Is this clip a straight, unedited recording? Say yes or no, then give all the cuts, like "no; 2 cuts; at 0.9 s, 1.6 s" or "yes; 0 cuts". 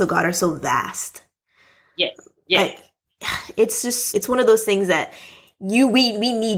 no; 1 cut; at 4.1 s